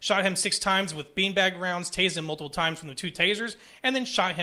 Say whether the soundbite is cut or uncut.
uncut